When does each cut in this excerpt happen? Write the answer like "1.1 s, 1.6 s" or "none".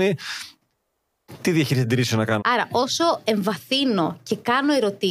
2.4 s